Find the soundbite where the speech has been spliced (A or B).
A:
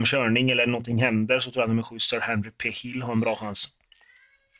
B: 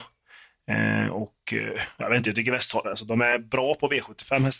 B